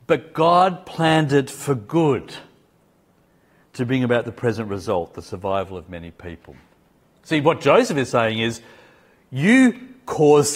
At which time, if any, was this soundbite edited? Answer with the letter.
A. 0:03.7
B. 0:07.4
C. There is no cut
C